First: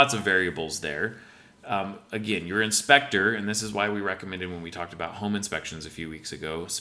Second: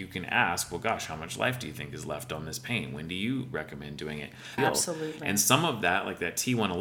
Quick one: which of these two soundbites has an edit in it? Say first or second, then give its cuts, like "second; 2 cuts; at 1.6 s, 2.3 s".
second; 1 cut; at 4.6 s